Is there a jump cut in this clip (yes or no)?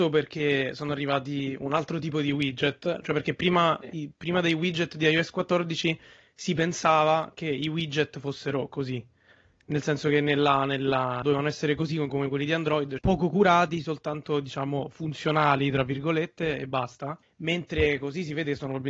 yes